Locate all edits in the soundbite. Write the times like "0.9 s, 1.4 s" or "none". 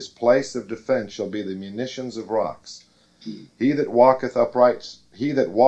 3.0 s